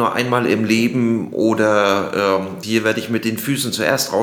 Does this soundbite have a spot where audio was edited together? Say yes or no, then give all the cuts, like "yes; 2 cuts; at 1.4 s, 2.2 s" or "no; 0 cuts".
yes; 1 cut; at 2.6 s